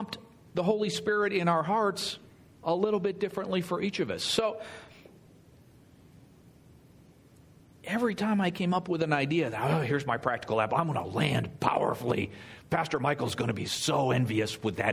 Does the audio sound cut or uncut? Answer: uncut